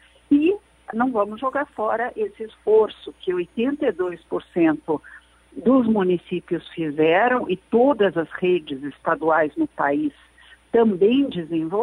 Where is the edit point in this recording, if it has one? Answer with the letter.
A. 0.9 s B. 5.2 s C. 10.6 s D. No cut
A